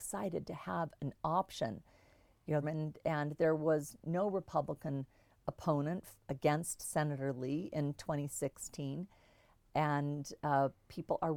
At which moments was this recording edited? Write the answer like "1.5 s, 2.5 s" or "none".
2.6 s